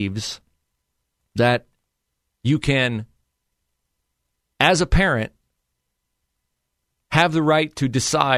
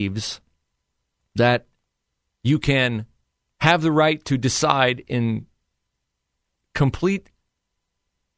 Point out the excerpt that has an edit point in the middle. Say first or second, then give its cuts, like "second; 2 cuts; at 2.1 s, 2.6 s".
second; 1 cut; at 3.4 s